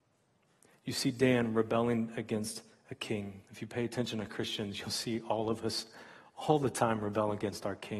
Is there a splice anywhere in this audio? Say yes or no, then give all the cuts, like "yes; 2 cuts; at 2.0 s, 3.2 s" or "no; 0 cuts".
yes; 1 cut; at 3.4 s